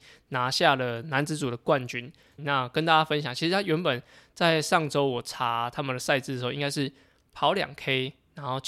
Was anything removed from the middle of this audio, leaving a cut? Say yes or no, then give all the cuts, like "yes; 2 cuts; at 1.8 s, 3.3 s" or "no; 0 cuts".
yes; 1 cut; at 2.4 s